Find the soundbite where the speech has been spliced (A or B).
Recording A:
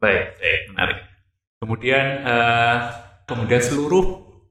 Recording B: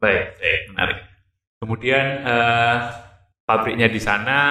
A